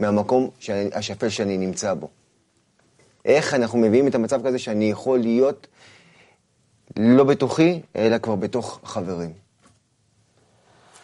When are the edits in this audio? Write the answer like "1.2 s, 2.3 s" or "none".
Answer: 3.2 s